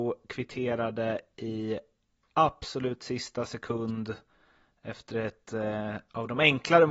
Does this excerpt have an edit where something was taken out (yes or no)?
no